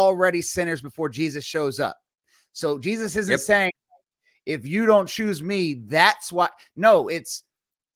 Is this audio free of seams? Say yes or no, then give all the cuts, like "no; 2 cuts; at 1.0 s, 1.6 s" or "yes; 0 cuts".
yes; 0 cuts